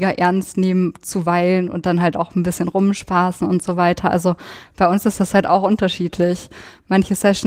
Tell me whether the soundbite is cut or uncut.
uncut